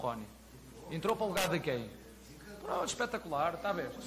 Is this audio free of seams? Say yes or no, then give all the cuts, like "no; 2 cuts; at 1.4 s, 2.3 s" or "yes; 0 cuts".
yes; 0 cuts